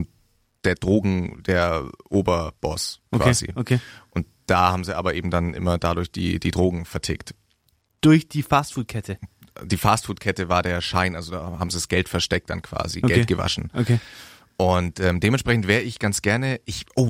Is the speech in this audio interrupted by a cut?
no; 0 cuts

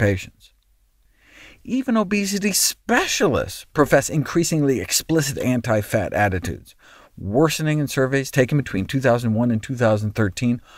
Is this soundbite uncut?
yes; 0 cuts

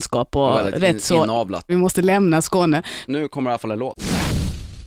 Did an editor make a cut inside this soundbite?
yes; 2 cuts; at 1.7 s, 3.1 s

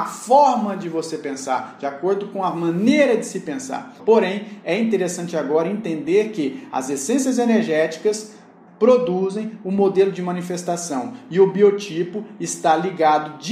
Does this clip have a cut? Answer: yes; 2 cuts; at 4.0 s, 8.7 s

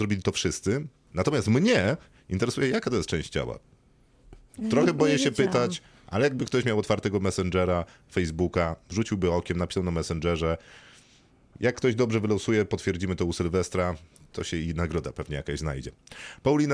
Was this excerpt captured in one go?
no; 1 cut; at 1.1 s

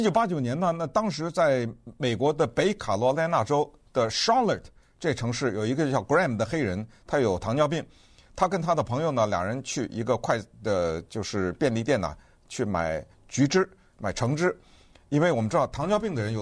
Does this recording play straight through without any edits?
yes; 0 cuts

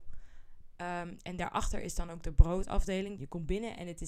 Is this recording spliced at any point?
yes; 1 cut; at 3.2 s

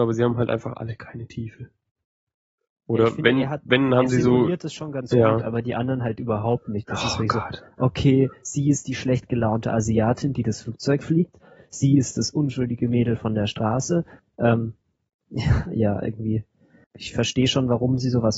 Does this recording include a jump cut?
yes; 2 cuts; at 14.2 s, 16.8 s

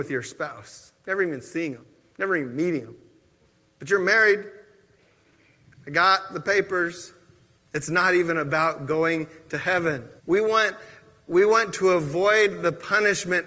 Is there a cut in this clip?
yes; 2 cuts; at 7.6 s, 10.2 s

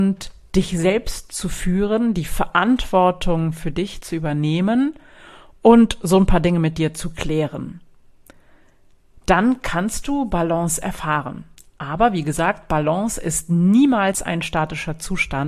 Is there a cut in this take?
no; 0 cuts

